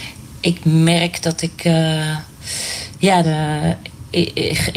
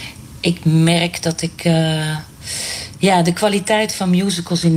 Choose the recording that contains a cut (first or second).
first